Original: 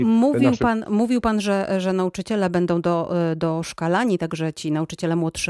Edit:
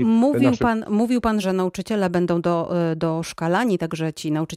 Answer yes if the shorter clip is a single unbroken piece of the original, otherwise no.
no